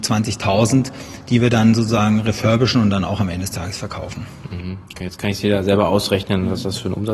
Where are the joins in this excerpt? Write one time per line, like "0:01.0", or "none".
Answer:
none